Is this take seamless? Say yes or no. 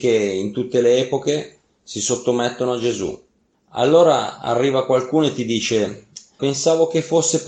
no